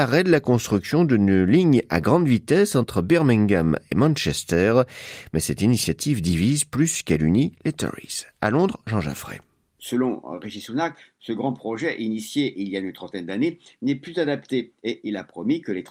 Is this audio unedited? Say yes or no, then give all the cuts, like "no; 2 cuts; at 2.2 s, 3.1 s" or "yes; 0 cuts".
yes; 0 cuts